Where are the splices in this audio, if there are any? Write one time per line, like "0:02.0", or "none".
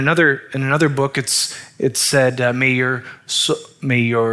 none